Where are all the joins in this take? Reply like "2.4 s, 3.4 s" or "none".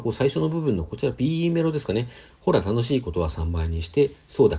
none